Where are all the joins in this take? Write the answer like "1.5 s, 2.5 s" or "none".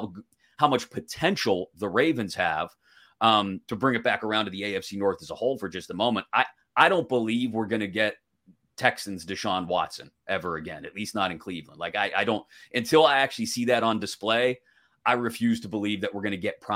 none